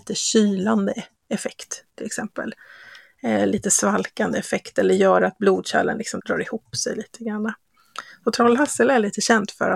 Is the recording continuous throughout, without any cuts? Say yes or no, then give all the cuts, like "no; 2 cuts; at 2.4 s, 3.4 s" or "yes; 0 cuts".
no; 1 cut; at 6.2 s